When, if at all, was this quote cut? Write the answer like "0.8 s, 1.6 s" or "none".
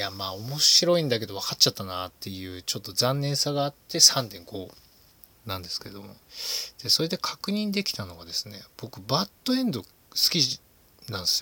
none